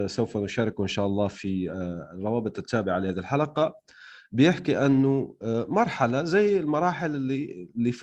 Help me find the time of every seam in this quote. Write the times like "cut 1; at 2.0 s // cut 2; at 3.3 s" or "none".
none